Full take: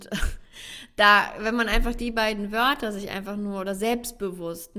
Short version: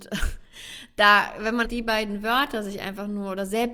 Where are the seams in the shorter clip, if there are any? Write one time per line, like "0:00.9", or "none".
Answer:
0:01.6